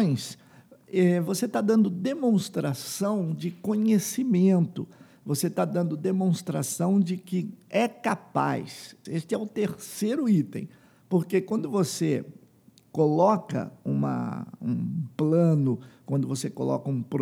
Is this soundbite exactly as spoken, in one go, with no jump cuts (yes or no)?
no